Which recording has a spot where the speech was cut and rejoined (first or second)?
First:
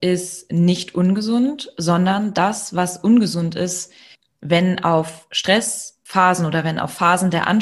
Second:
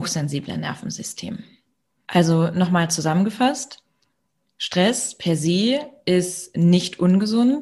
second